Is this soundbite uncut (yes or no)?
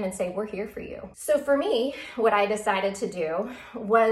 no